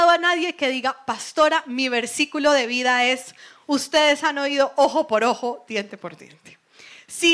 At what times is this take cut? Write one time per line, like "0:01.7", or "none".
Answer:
none